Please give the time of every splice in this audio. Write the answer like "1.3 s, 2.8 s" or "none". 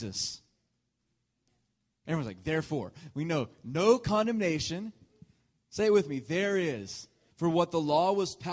2.1 s, 7.3 s